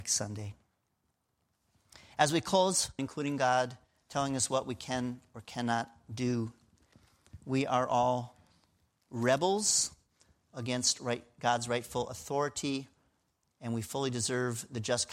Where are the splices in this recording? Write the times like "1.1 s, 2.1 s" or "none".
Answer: 3.0 s